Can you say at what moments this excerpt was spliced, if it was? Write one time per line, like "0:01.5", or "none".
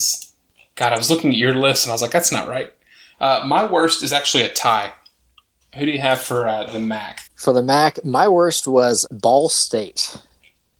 0:05.6
0:07.3
0:09.1